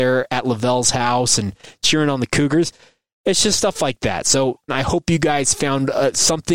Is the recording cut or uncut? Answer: cut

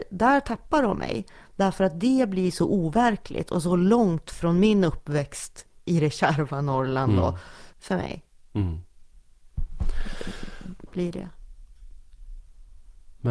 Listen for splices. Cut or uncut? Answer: cut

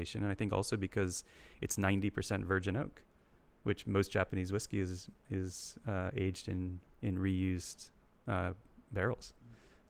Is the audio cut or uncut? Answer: uncut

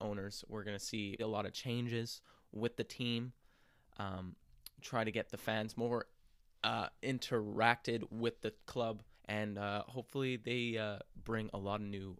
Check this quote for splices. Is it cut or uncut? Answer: cut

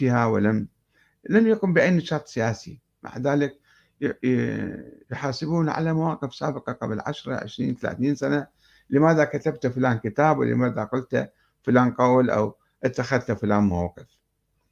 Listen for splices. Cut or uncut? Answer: uncut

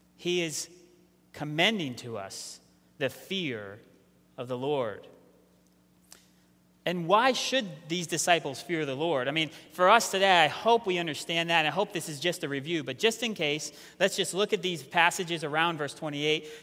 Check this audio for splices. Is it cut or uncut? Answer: uncut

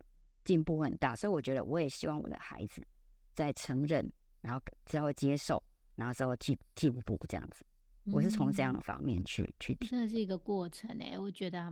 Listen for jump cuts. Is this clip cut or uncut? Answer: uncut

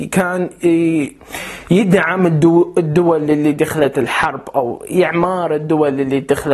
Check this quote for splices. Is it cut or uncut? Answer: uncut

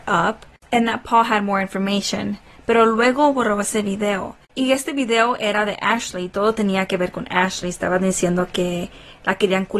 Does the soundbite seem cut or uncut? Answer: uncut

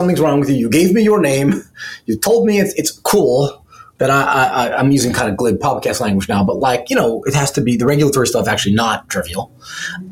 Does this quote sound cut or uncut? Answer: uncut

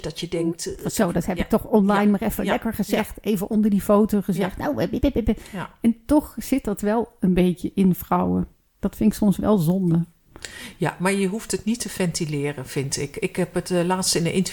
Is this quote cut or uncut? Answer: uncut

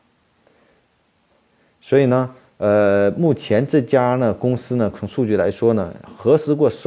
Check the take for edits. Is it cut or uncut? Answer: uncut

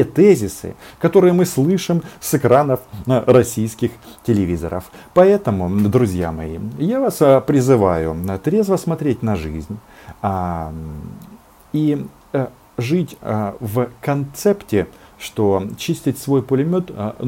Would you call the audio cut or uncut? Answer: uncut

